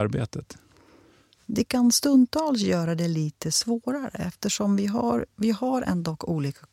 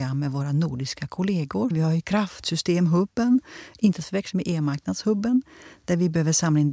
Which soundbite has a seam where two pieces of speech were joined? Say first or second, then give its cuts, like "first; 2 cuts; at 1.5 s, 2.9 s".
second; 1 cut; at 1.7 s